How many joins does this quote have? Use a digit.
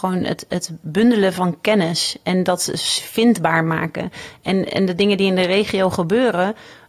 0